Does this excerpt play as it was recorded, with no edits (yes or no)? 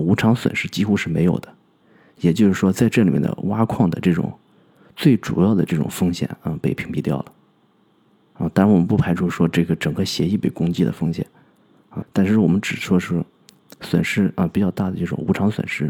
no